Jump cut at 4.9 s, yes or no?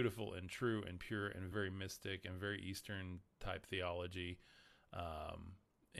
no